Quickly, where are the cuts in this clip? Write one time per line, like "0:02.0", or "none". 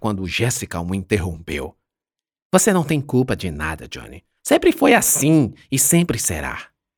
0:04.4